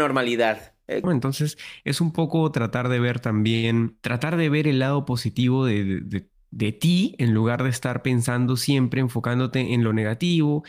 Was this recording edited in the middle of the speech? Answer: yes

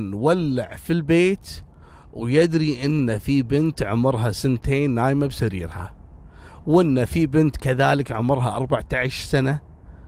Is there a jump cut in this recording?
no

